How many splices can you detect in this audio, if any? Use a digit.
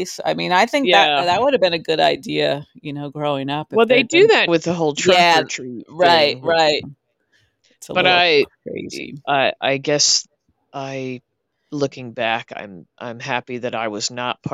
2